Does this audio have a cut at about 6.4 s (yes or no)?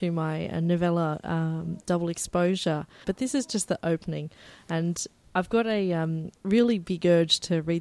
yes